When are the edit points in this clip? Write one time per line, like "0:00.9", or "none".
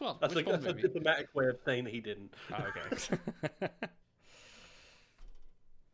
none

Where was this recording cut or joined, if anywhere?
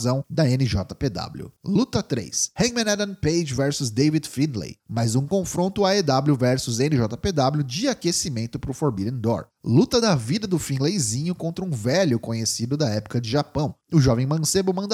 0:01.6

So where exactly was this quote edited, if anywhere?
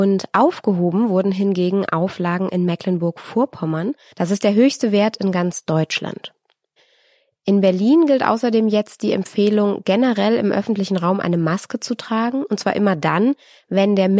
0:04.1

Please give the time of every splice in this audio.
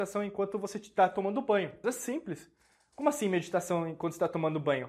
0:01.8

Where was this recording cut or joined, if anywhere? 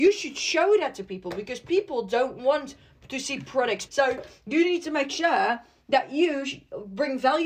0:03.9

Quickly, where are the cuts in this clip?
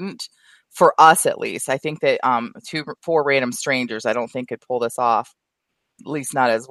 0:03.0

